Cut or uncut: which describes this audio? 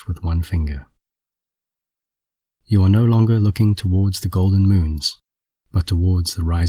cut